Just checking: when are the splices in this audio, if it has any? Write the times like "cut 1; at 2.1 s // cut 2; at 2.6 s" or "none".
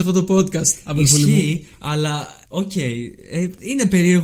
none